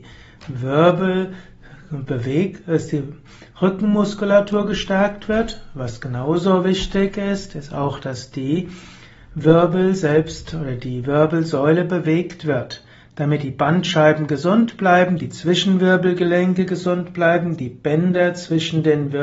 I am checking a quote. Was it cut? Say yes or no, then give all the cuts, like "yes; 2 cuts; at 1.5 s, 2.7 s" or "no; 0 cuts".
no; 0 cuts